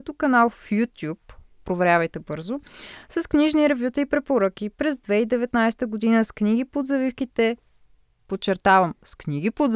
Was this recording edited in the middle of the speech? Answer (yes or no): no